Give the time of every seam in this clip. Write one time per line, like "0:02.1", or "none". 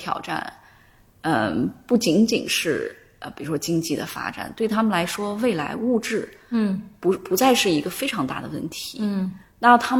none